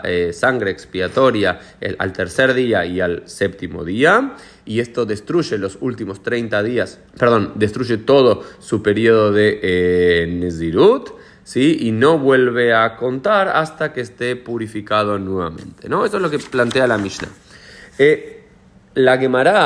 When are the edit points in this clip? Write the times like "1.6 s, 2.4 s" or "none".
7.1 s